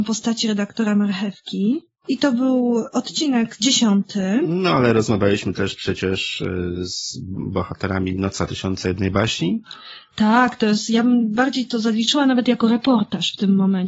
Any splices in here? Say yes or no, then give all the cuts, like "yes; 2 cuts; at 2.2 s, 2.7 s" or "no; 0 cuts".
no; 0 cuts